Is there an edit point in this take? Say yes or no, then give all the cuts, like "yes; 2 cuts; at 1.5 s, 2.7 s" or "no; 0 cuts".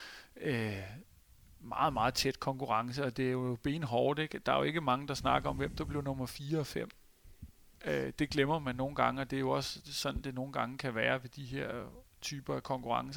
no; 0 cuts